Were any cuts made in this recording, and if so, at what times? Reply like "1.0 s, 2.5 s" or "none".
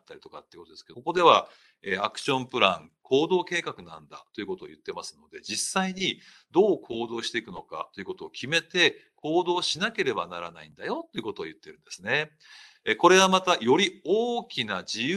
0.9 s

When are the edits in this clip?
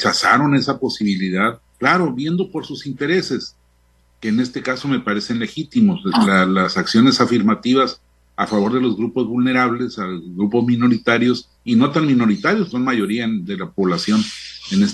1.7 s, 11.6 s, 12.7 s

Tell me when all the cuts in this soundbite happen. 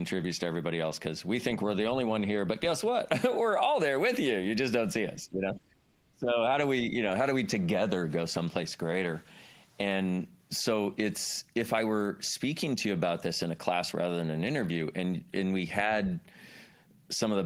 none

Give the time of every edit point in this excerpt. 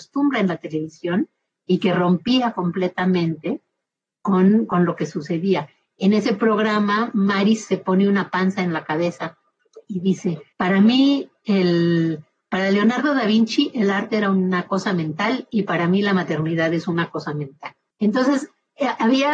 10.5 s

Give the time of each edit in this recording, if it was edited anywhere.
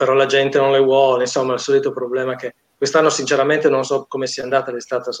none

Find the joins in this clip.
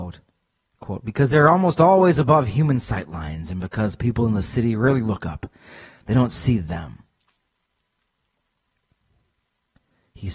none

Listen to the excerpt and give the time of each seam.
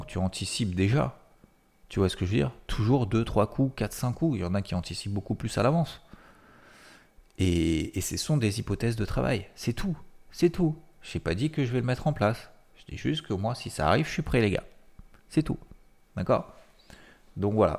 none

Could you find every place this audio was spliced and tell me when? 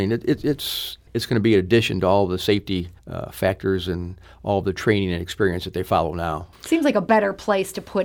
1.1 s, 3.0 s, 6.5 s

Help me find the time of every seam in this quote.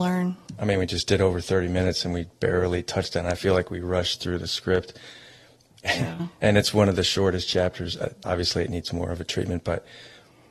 8.2 s

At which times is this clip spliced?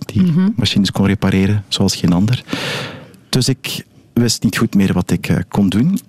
none

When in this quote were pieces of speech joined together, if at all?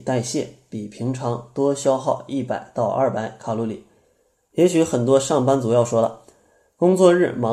4.3 s

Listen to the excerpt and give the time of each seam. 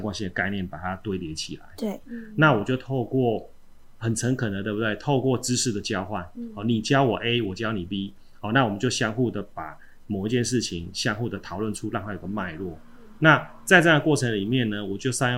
2.0 s

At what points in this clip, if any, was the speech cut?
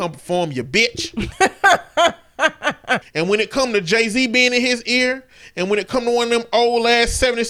3.0 s

